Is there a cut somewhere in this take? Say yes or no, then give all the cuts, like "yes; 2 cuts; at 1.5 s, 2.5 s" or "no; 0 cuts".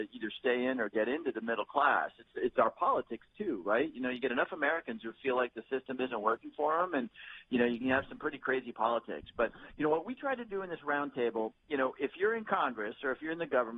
no; 0 cuts